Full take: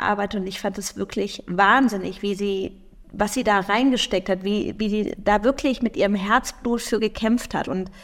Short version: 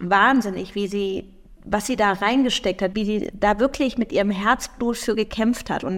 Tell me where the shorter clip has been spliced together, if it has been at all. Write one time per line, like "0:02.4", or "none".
0:02.9